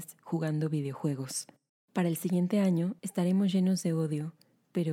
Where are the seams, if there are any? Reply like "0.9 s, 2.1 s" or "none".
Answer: 1.7 s, 3.0 s